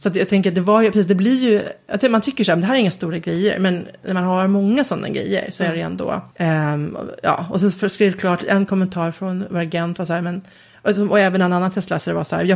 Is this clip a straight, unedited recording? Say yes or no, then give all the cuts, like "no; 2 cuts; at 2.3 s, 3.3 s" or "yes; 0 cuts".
no; 1 cut; at 6.3 s